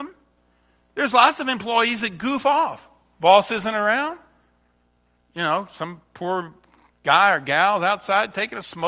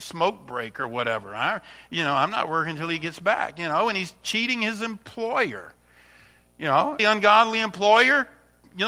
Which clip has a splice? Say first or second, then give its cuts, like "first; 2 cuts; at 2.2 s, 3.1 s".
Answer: second; 1 cut; at 7.0 s